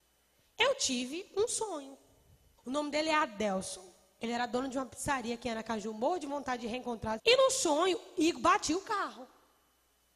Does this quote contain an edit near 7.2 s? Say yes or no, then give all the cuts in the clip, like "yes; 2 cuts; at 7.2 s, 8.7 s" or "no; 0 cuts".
yes; 2 cuts; at 2.6 s, 7.2 s